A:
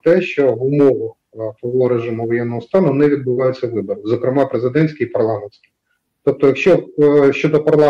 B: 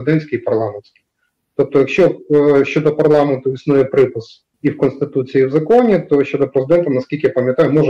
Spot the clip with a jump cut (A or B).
B